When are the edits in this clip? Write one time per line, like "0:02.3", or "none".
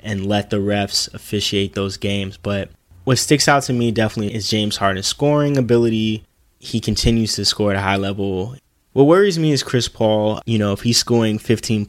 0:10.4